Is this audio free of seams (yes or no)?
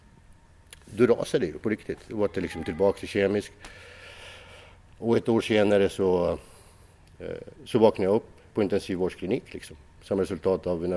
no